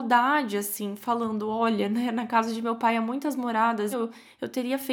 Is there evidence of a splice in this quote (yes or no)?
yes